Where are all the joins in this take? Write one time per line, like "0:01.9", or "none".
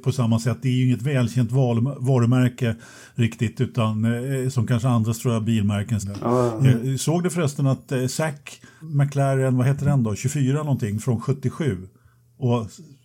0:06.0
0:08.8